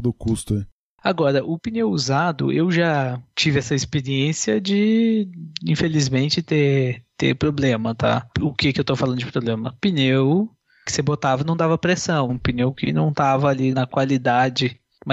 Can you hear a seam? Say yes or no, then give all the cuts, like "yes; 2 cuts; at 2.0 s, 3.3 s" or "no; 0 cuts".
yes; 3 cuts; at 8.3 s, 12.3 s, 13.7 s